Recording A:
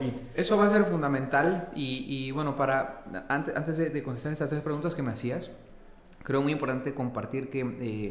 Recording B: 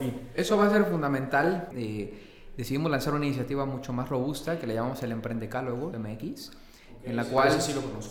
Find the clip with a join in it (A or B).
B